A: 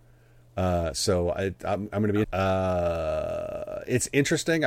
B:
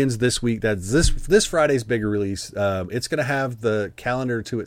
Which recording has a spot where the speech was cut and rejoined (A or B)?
A